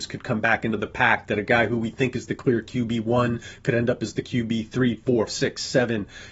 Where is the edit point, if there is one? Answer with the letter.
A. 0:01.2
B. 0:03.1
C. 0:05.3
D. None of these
C